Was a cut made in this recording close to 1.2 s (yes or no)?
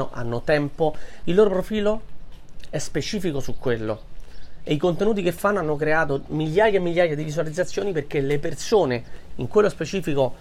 yes